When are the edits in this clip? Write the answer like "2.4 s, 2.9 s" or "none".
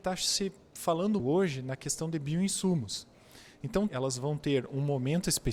1.2 s, 3.9 s